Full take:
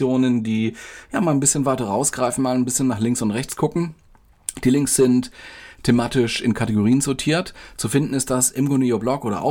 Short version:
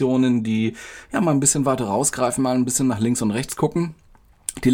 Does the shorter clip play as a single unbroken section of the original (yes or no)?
yes